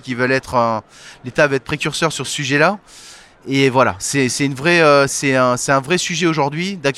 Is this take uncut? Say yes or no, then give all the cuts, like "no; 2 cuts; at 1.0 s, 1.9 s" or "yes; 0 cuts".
yes; 0 cuts